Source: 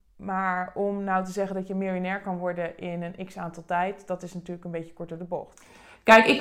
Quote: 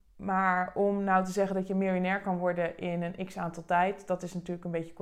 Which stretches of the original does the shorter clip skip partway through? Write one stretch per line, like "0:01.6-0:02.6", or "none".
none